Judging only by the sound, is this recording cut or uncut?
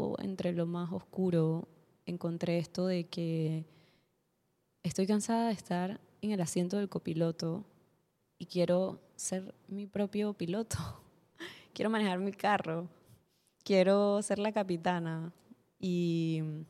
uncut